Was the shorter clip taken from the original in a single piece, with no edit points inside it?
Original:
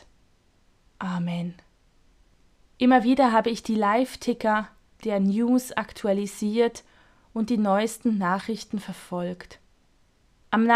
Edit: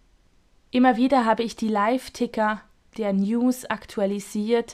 yes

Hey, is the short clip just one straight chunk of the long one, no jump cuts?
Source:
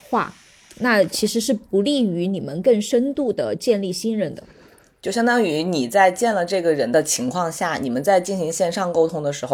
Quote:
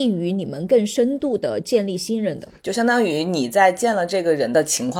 no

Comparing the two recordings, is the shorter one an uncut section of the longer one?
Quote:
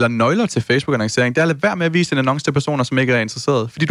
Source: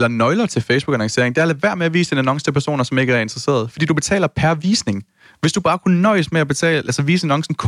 yes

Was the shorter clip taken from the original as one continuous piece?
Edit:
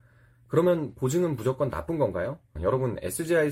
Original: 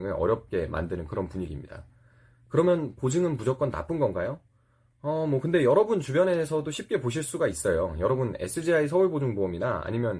no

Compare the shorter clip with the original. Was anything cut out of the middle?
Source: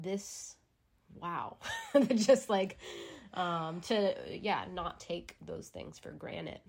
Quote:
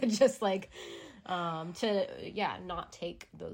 no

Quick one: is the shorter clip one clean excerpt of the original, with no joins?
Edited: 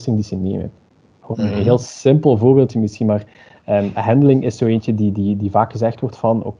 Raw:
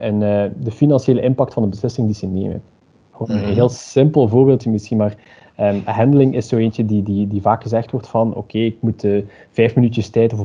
yes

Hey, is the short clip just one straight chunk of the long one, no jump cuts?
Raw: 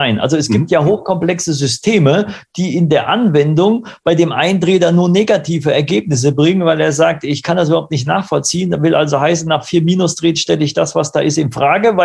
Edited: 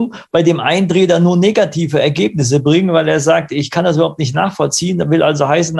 yes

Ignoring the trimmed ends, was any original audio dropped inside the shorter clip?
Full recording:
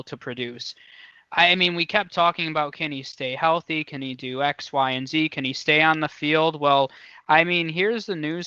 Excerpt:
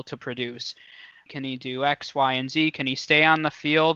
yes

